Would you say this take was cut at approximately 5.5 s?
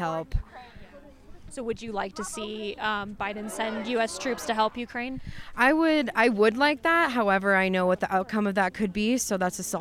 no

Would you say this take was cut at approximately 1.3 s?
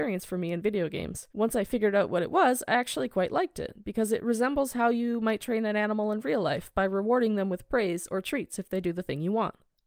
yes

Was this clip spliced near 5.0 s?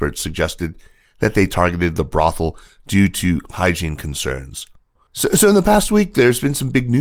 yes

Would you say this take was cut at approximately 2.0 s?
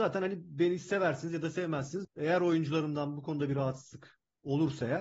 yes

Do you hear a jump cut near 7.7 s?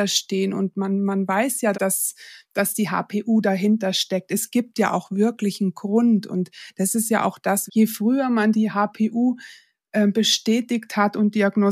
yes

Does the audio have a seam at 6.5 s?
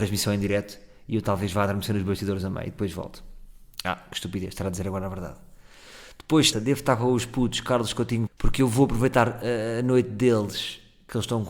yes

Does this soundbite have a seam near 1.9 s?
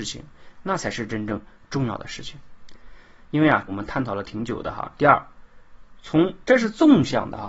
no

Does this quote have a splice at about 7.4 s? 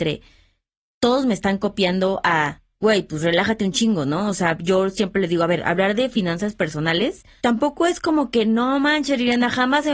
yes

